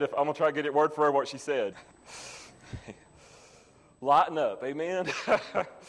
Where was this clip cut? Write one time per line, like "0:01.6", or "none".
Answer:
0:01.7